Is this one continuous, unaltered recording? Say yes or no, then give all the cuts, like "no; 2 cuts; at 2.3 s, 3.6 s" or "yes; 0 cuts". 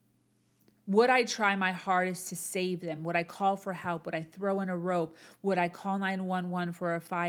yes; 0 cuts